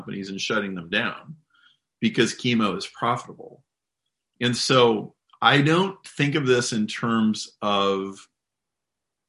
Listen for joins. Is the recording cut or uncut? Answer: uncut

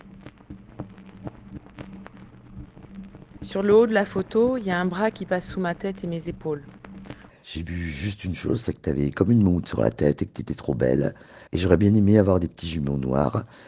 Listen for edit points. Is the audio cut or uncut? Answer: cut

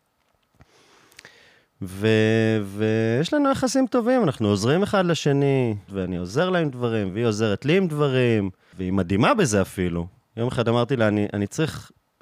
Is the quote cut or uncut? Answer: cut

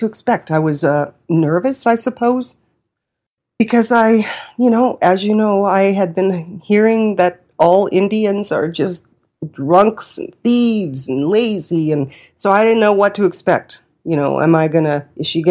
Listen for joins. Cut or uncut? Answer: uncut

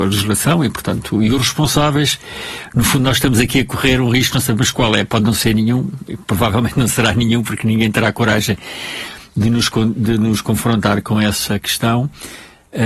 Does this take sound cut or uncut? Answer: uncut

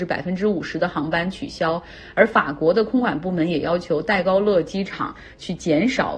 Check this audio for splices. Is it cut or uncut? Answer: uncut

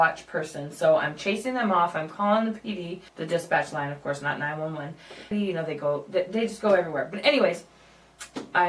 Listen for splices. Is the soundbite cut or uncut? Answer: cut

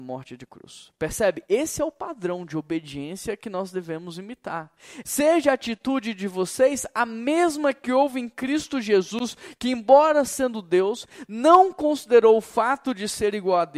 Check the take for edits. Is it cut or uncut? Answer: cut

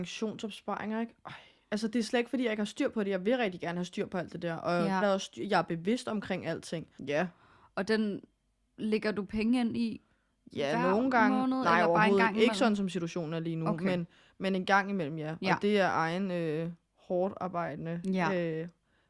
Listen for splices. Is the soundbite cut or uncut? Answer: cut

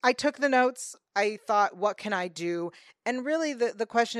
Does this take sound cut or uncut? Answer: uncut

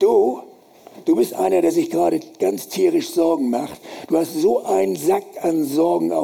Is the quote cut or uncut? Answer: uncut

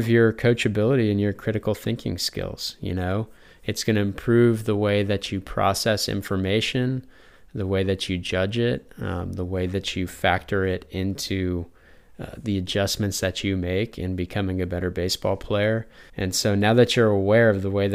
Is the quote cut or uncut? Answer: cut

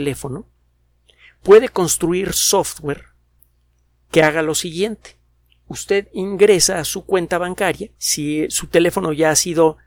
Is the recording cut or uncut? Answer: cut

